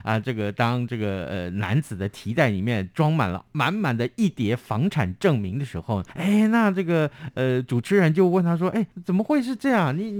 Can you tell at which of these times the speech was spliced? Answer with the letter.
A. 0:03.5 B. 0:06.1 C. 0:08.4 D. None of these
B